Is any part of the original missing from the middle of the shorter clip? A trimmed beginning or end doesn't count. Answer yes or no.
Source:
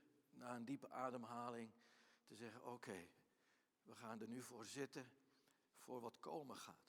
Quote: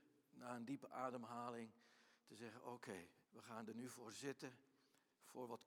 yes